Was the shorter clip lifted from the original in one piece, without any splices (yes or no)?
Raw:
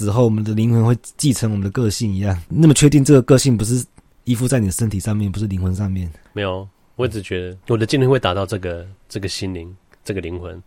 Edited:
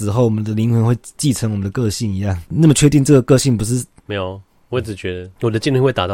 no